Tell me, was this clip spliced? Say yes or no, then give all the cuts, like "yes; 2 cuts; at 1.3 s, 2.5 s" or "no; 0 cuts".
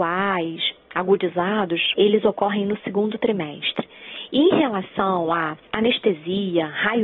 yes; 1 cut; at 1.9 s